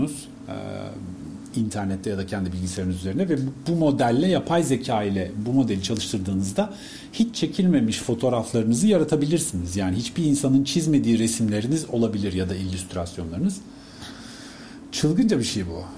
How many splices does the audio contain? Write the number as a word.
zero